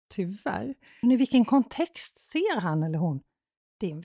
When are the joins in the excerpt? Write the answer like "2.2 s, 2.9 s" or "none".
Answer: 1.0 s